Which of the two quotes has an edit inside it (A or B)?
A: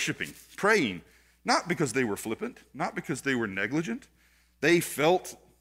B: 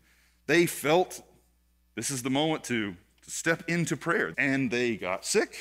B